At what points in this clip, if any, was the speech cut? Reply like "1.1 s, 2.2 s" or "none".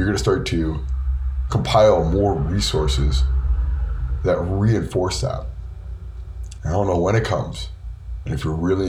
6.6 s